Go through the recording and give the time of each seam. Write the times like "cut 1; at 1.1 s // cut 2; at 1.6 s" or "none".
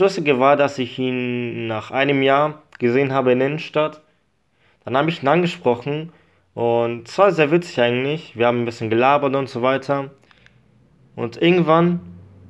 none